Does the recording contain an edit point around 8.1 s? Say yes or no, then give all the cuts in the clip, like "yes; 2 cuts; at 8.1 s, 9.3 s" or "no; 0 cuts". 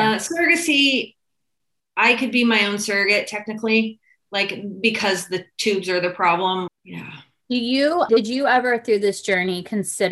yes; 2 cuts; at 6.7 s, 8.1 s